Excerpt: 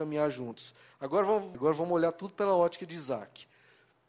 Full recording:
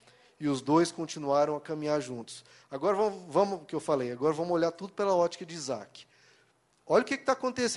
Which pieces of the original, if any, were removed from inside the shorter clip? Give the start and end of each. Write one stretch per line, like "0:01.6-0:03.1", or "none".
0:03.2-0:04.1